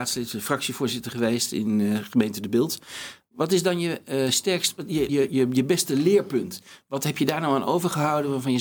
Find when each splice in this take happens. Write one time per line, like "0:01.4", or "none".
0:05.1